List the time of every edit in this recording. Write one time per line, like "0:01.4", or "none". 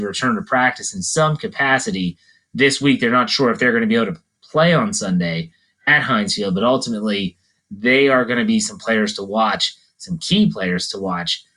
none